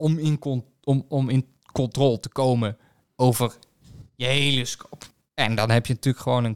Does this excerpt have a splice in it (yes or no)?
no